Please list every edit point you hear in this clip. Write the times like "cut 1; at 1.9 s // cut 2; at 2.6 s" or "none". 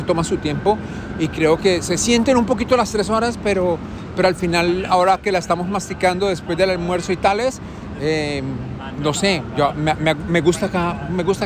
none